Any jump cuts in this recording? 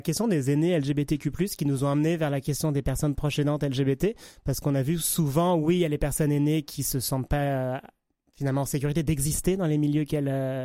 no; 0 cuts

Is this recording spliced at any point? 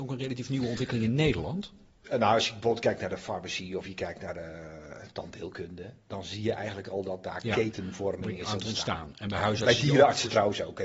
yes; 1 cut; at 2.0 s

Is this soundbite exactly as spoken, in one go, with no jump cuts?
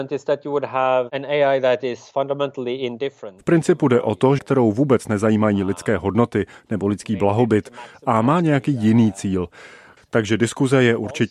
no; 2 cuts; at 4.4 s, 10.0 s

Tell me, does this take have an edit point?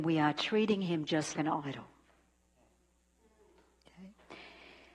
yes; 1 cut; at 1.3 s

